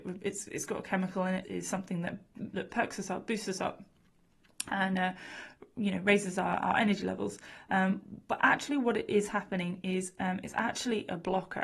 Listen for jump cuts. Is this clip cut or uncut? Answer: cut